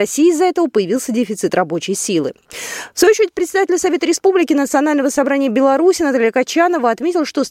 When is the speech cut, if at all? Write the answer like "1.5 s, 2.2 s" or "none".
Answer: none